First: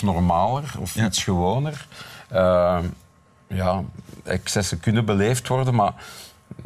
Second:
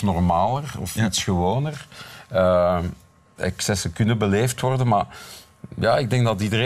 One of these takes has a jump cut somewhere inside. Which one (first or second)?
second